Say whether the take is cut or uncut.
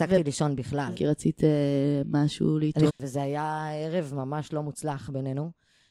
cut